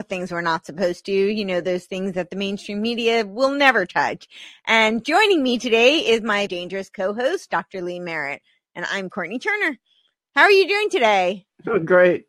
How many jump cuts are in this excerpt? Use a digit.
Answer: 1